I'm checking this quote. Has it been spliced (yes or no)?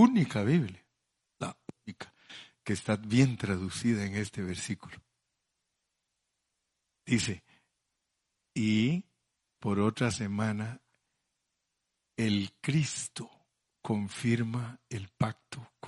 no